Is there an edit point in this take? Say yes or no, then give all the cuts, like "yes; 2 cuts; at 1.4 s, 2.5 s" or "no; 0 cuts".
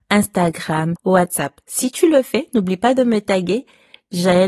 yes; 1 cut; at 1.0 s